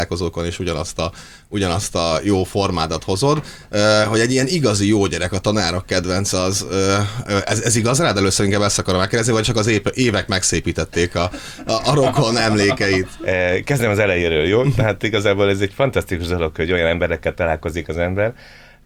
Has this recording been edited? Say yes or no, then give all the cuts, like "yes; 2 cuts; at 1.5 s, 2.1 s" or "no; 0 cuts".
no; 0 cuts